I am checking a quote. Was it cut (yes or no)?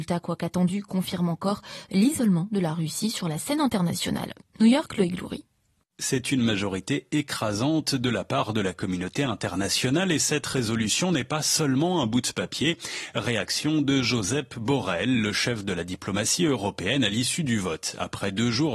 no